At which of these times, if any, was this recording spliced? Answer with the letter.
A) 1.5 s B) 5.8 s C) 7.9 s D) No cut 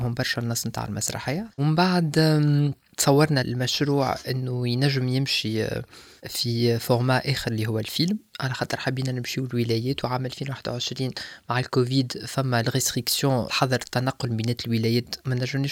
A